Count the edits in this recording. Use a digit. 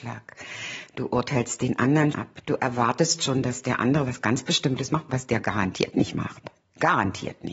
1